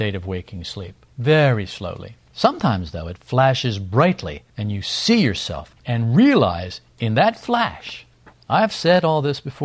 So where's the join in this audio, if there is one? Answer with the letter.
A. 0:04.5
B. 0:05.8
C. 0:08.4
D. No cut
B